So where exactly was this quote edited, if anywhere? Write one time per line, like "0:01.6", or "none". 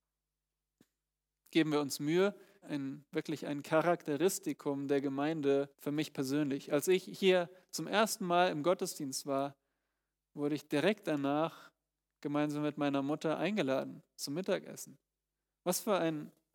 0:02.6
0:05.7